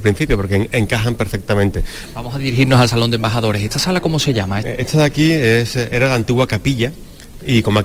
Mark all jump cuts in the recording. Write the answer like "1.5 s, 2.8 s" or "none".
4.6 s